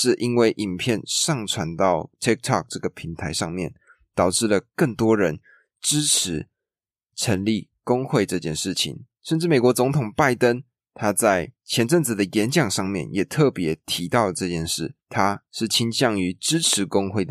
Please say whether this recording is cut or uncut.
cut